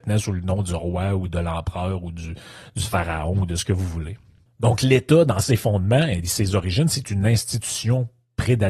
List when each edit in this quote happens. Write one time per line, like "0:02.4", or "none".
none

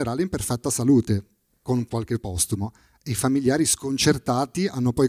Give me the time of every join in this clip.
none

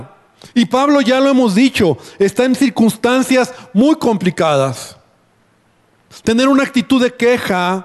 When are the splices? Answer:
0:06.1

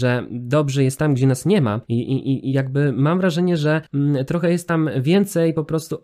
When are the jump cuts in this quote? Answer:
0:01.8

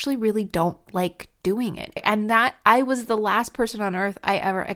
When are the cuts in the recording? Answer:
0:02.0

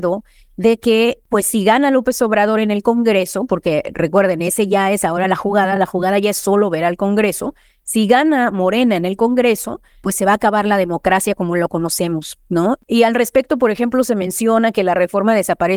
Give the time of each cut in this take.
none

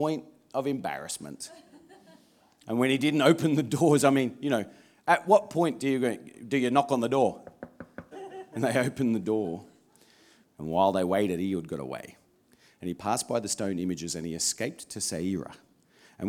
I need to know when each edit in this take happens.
0:08.1
0:10.4

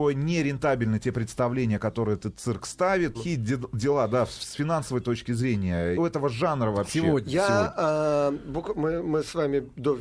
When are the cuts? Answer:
0:03.1
0:05.9

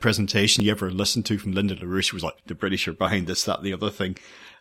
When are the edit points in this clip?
0:02.4

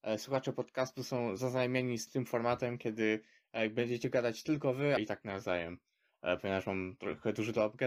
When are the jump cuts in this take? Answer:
0:02.1
0:05.0

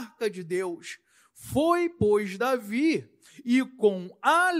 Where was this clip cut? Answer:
none

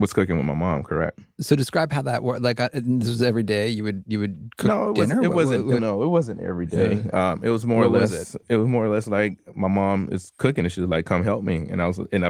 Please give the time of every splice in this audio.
0:05.8

